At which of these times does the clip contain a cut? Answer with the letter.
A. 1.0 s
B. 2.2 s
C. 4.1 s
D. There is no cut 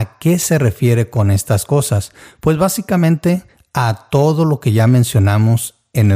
D